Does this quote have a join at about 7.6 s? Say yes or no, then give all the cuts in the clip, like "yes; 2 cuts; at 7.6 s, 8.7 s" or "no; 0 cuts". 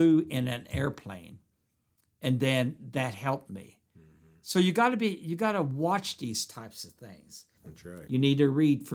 yes; 1 cut; at 7.6 s